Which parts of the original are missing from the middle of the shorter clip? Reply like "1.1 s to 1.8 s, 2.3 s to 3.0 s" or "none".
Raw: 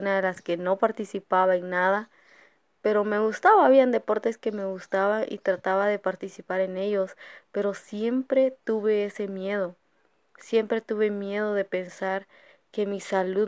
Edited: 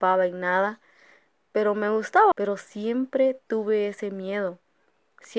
3.6 s to 7.5 s